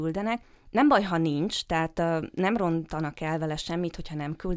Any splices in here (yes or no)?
no